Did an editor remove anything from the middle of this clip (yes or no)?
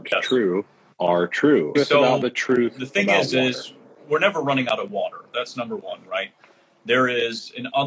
yes